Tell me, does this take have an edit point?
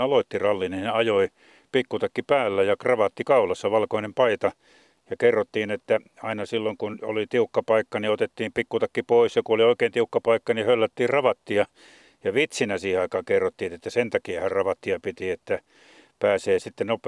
no; 0 cuts

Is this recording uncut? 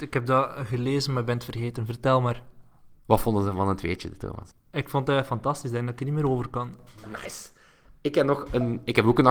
no; 1 cut; at 3.0 s

